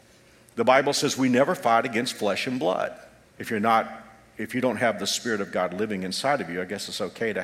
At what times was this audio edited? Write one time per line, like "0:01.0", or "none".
0:03.2